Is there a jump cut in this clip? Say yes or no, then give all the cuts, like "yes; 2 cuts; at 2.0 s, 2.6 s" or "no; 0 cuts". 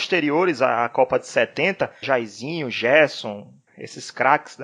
yes; 2 cuts; at 2.0 s, 3.7 s